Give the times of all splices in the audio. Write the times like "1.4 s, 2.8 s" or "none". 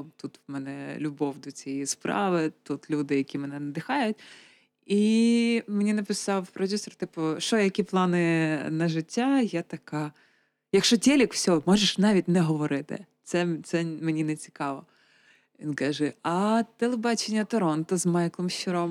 none